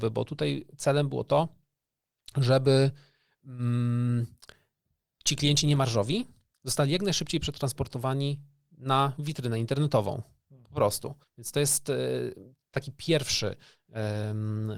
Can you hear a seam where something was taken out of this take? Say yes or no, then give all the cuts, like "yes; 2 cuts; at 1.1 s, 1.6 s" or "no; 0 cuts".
yes; 1 cut; at 11.2 s